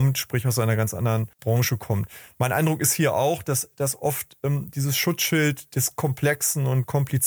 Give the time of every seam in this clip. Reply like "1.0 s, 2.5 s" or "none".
1.3 s